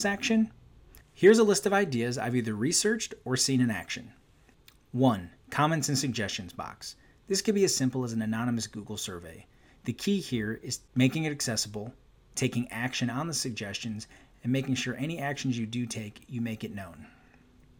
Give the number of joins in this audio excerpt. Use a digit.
0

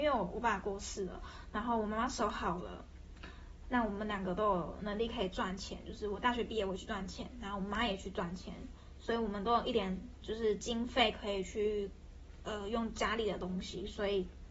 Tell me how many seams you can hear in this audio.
0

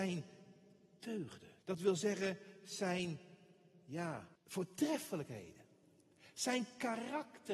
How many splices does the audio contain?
2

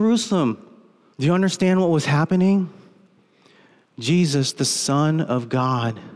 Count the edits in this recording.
1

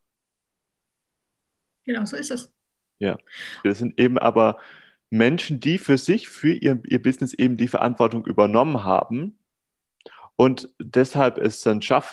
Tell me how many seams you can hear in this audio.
1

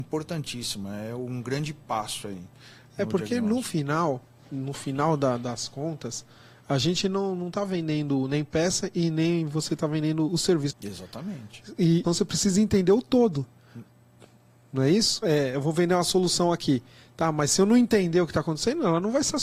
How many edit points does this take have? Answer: 3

